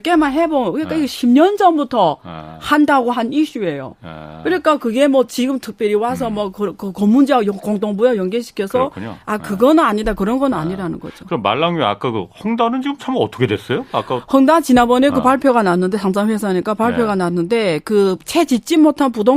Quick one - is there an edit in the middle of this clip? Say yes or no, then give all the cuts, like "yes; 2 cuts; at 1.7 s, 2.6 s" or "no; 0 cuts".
no; 0 cuts